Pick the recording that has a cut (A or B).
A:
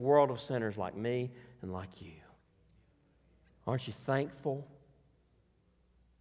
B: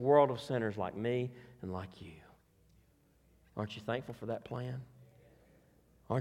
A